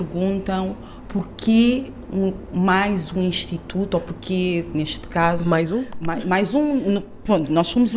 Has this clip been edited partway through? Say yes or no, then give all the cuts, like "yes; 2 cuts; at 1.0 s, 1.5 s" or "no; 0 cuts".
no; 0 cuts